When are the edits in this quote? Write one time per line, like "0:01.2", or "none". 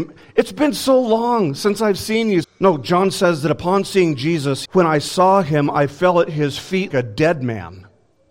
0:02.4
0:04.6
0:06.9